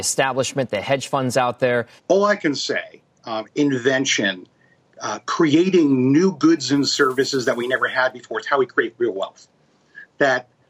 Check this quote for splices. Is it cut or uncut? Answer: cut